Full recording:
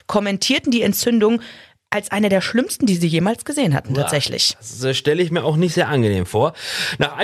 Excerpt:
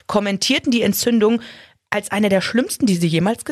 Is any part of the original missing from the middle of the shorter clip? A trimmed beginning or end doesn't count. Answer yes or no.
no